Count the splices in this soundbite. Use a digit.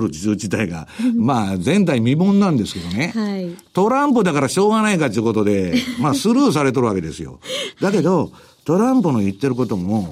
0